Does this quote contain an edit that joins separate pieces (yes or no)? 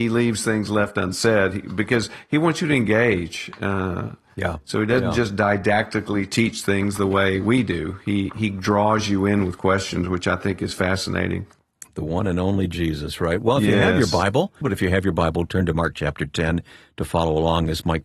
yes